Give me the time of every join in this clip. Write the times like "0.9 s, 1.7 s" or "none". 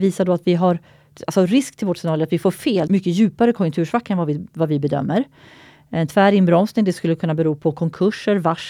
2.9 s